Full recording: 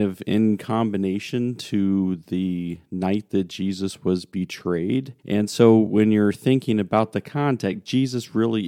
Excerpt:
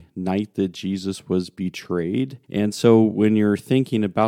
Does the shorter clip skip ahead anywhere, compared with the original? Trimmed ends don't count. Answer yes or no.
no